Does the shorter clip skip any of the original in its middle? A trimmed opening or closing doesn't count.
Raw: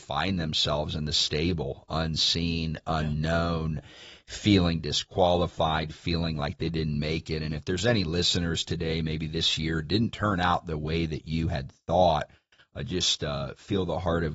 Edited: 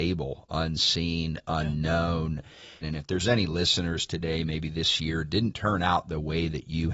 yes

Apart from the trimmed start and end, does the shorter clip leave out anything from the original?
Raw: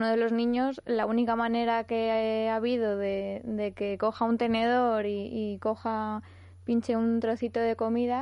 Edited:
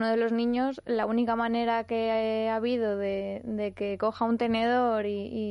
no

